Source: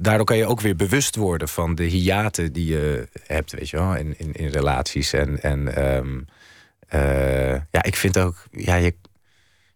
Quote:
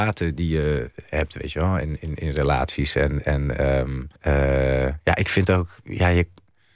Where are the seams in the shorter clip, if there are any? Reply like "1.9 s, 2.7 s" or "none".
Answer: 4.2 s